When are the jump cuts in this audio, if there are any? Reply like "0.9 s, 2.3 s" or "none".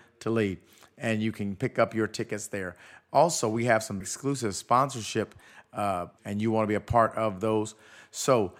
4.0 s, 6.2 s